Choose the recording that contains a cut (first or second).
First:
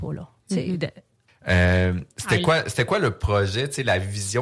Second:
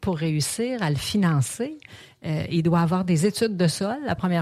first